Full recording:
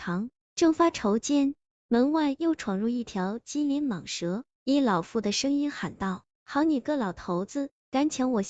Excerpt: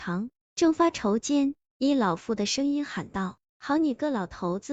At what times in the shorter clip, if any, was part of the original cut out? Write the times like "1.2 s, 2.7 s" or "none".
1.7 s